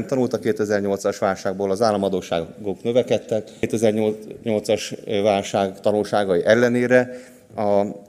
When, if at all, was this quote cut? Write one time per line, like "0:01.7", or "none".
none